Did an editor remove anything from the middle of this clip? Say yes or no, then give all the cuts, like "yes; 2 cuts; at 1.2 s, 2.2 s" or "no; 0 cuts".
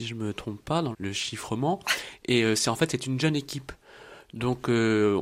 yes; 1 cut; at 0.9 s